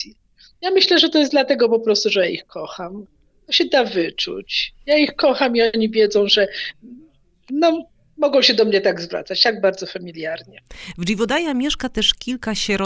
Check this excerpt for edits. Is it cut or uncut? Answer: uncut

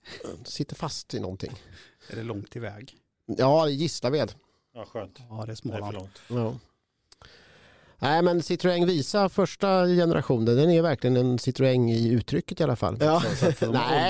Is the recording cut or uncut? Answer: cut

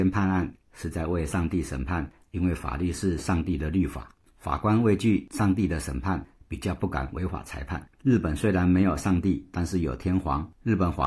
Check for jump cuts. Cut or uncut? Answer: cut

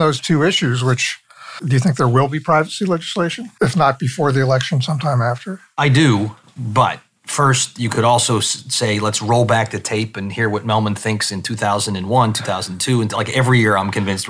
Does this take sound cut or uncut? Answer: uncut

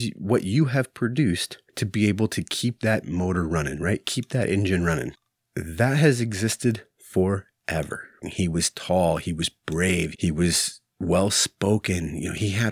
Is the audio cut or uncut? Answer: cut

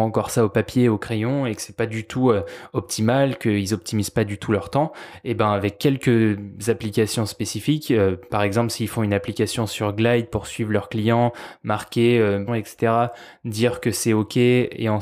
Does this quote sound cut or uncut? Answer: cut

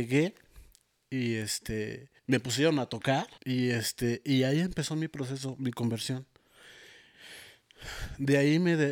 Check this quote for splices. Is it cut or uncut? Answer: cut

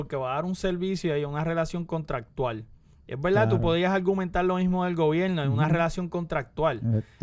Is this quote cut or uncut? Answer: uncut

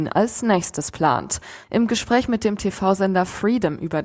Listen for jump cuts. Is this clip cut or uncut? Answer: cut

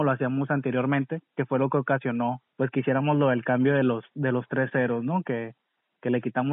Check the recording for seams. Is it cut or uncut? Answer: cut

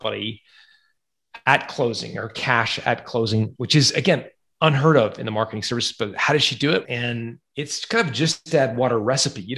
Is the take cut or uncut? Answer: cut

